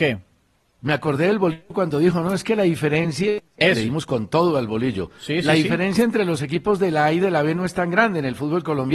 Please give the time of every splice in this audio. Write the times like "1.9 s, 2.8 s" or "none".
3.6 s